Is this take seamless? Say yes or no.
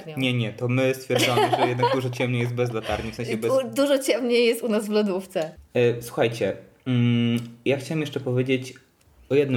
yes